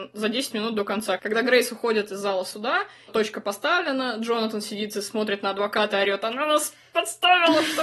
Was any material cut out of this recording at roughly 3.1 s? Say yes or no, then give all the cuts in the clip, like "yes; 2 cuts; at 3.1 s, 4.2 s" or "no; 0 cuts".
yes; 1 cut; at 3.1 s